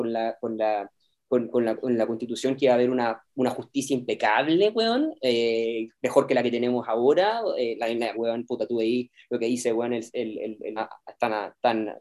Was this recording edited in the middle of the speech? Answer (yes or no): yes